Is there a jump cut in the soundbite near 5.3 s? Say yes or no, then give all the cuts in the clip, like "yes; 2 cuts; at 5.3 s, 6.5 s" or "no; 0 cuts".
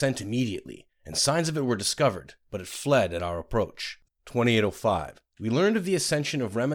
yes; 2 cuts; at 4.0 s, 5.3 s